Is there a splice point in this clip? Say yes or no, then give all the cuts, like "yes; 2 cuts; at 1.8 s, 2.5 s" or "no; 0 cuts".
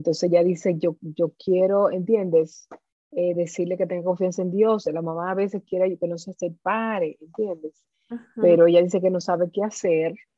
no; 0 cuts